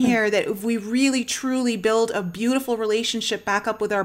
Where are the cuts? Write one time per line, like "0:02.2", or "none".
none